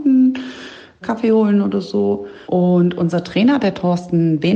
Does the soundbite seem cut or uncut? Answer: cut